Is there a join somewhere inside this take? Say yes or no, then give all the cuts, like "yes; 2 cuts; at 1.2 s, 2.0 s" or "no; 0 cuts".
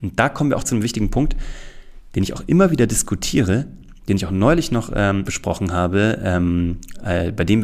yes; 1 cut; at 5.3 s